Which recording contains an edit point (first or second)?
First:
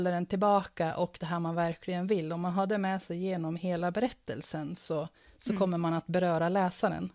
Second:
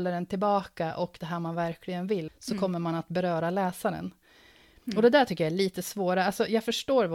second